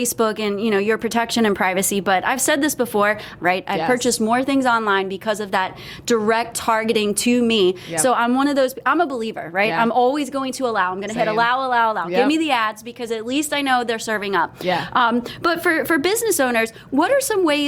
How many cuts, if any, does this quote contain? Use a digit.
1